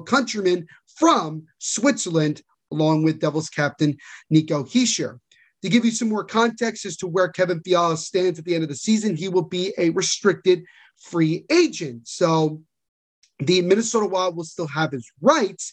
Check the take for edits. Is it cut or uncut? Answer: uncut